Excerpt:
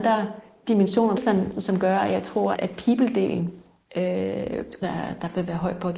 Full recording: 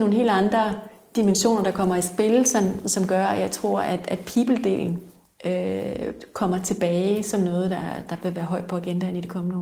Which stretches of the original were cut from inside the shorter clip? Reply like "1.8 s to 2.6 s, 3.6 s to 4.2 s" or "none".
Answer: 1.6 s to 2.4 s, 3.8 s to 4.0 s, 6.3 s to 7.7 s